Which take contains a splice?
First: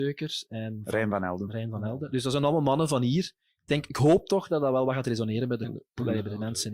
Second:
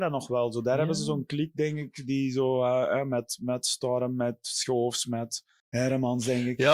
second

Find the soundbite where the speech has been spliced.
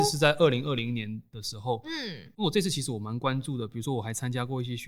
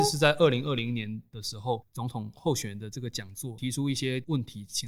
second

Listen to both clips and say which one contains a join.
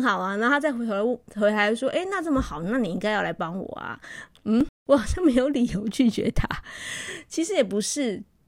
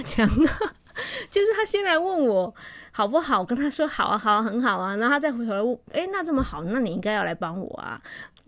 second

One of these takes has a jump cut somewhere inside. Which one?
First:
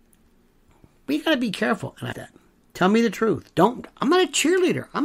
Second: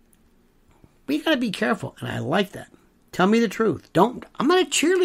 first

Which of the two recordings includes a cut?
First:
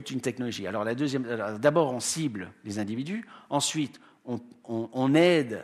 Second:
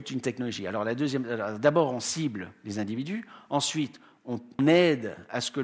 second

